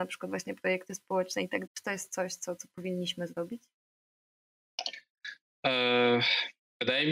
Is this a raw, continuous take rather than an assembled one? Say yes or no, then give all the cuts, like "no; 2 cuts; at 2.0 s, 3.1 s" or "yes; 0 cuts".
no; 1 cut; at 1.7 s